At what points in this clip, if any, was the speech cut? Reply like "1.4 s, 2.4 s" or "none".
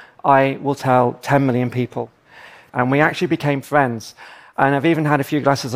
2.7 s